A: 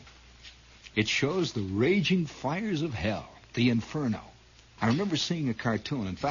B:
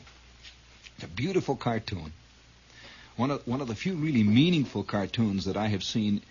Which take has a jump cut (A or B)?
A